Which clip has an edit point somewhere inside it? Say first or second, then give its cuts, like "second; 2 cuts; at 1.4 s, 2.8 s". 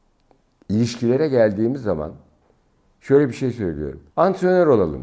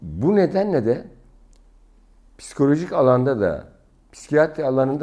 first; 1 cut; at 4.1 s